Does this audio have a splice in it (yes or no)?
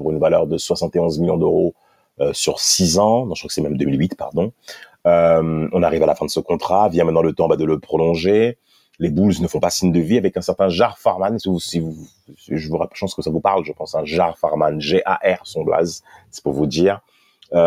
no